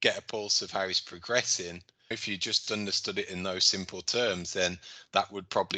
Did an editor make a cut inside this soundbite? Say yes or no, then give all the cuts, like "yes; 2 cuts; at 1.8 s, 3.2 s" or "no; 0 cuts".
yes; 1 cut; at 2.1 s